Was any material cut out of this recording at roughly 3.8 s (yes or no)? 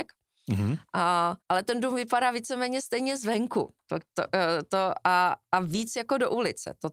no